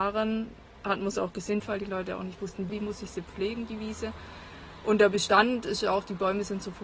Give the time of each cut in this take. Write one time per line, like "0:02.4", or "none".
0:01.6
0:02.7